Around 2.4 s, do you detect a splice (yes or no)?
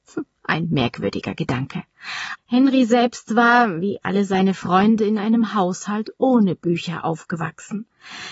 yes